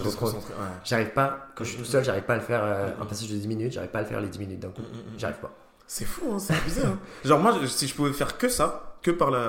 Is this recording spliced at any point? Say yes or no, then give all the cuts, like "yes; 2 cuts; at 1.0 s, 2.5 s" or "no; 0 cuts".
no; 0 cuts